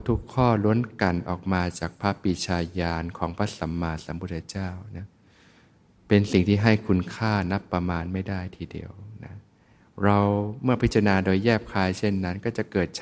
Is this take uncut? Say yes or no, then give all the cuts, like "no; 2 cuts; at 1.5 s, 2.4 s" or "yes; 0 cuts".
yes; 0 cuts